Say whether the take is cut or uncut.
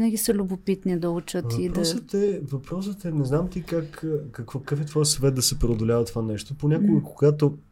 uncut